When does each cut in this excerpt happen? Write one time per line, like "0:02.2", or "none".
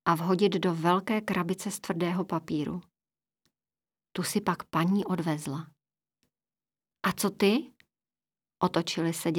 0:06.9

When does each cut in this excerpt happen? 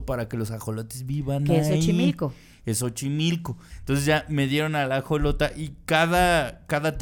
0:03.7

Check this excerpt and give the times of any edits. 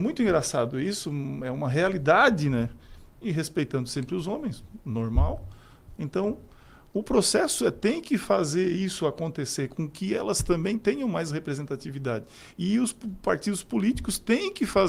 0:03.1
0:06.0

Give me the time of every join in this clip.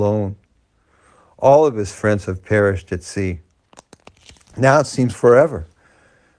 0:05.1

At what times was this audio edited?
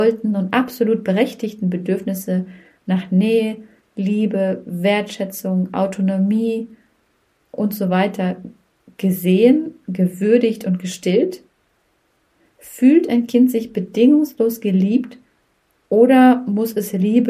none

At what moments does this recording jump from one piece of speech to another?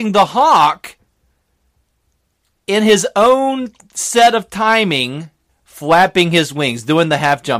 0:02.5
0:05.5

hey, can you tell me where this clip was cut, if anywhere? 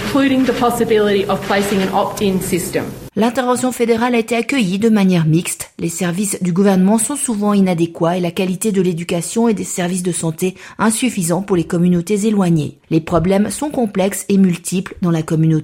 none

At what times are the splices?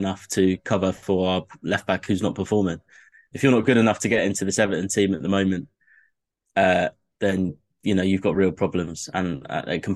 0:07.1

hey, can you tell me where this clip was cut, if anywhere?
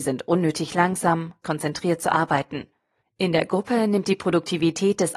0:01.4
0:03.0

